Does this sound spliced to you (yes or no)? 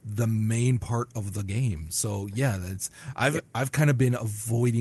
no